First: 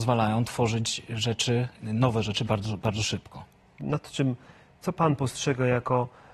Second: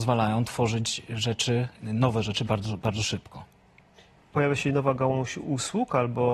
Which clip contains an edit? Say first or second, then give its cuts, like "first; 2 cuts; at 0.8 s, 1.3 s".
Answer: first; 1 cut; at 3.8 s